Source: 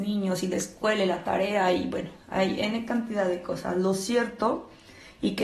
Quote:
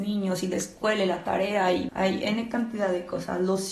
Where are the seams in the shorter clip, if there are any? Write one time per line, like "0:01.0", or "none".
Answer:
0:01.9